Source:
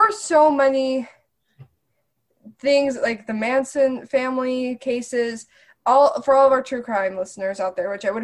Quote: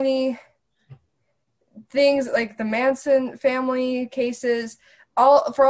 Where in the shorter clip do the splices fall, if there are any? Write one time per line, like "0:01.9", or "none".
none